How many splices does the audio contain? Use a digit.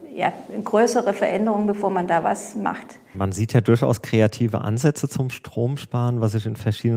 1